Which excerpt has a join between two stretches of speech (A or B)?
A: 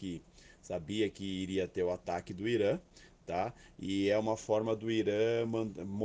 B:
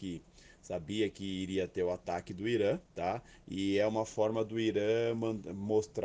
B